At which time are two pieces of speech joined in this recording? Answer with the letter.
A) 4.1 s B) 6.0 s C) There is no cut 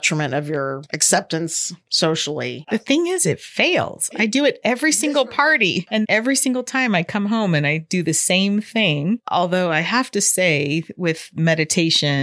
B